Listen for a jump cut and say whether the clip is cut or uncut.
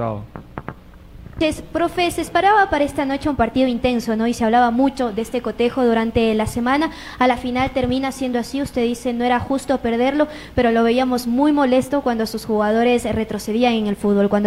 uncut